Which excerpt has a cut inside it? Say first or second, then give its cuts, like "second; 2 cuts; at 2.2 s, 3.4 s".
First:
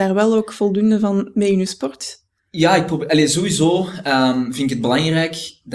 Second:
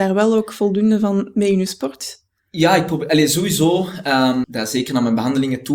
second; 1 cut; at 4.4 s